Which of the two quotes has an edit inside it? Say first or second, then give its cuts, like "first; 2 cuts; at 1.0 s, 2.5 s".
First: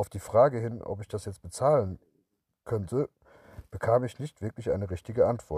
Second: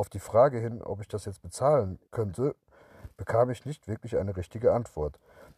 second; 1 cut; at 2.1 s